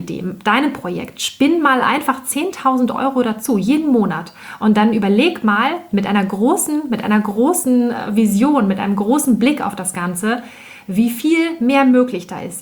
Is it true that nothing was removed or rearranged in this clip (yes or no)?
yes